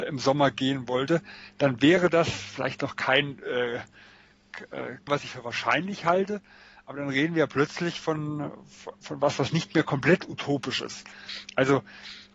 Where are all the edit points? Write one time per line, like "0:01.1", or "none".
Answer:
0:05.1